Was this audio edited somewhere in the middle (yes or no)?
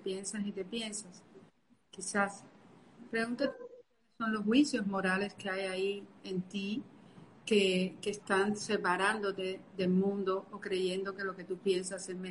no